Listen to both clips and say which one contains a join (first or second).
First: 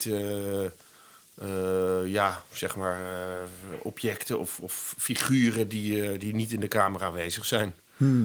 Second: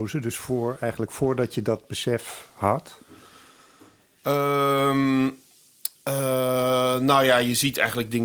second